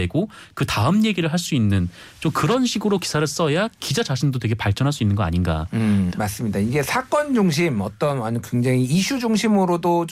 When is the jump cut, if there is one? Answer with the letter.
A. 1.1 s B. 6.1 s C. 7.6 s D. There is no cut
B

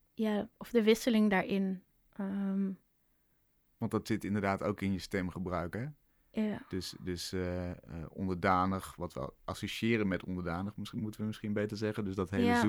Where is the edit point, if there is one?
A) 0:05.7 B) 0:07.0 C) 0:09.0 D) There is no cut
D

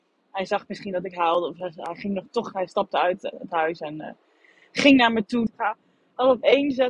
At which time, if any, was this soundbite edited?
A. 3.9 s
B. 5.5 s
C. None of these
B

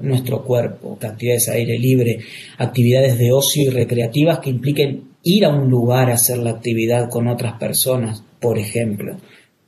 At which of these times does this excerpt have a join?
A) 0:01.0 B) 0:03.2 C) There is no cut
A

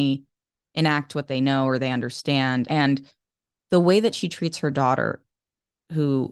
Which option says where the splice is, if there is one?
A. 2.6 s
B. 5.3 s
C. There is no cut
A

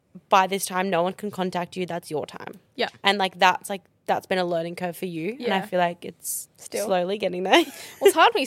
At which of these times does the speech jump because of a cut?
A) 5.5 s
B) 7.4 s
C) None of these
C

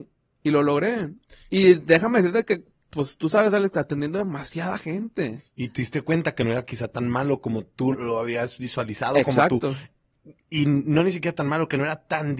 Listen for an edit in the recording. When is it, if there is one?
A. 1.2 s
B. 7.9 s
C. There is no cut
B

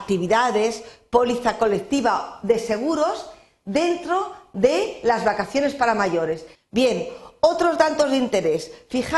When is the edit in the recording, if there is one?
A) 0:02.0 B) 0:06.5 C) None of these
B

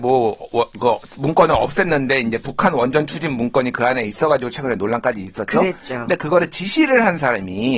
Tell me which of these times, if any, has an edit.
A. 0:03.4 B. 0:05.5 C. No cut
C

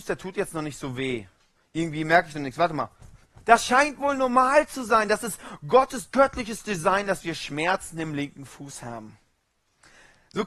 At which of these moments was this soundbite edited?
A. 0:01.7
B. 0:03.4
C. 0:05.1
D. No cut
B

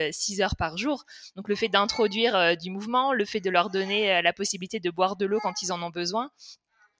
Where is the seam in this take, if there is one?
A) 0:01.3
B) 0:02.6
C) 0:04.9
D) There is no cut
D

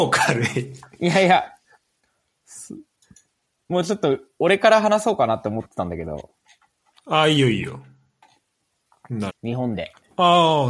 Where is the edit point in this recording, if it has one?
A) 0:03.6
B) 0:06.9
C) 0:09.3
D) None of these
C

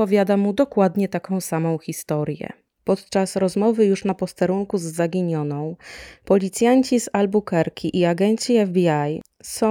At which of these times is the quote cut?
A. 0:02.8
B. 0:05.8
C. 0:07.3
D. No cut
D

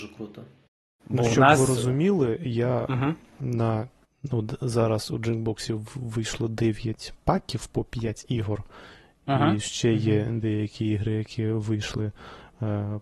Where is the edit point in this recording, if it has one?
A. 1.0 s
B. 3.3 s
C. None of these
C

